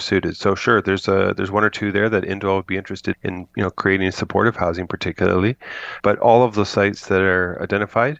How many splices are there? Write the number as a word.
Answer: two